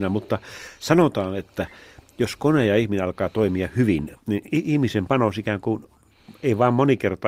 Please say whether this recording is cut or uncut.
uncut